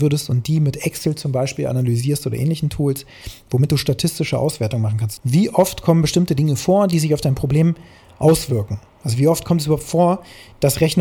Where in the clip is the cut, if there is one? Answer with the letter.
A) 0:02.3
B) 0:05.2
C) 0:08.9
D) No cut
B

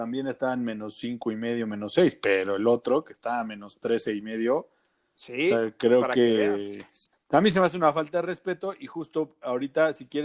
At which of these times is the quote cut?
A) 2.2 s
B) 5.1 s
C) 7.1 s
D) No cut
C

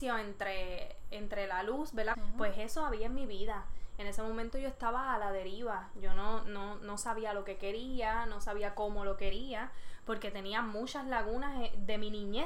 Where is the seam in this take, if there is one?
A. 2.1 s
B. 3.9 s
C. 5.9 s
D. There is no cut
A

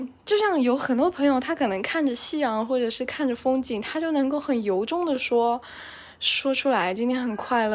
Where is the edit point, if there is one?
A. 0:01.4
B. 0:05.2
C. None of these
C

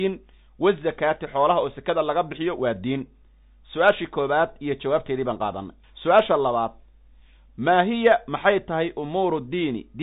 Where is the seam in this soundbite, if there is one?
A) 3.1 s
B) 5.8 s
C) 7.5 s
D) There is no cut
B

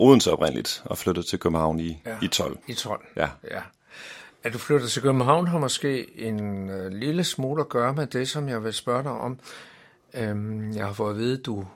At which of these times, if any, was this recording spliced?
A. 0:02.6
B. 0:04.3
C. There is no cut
A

